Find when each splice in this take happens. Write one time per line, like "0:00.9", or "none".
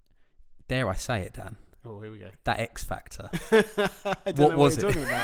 none

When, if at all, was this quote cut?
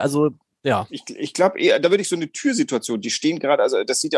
none

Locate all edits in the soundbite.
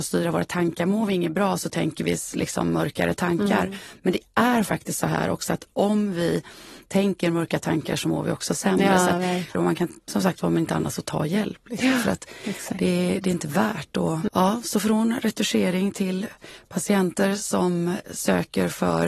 0:09.5
0:14.3

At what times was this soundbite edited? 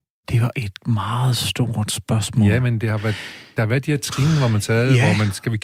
none

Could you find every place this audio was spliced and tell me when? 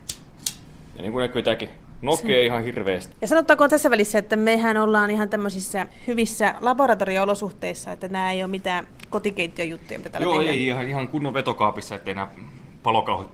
none

